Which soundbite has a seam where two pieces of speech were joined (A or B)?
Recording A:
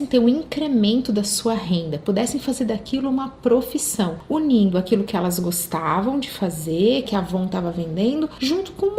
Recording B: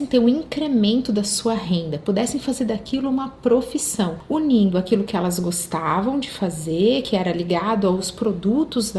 A